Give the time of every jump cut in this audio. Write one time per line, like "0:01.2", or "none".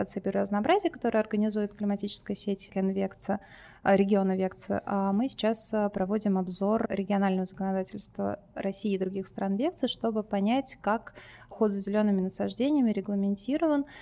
none